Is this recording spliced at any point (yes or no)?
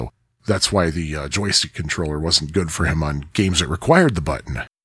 no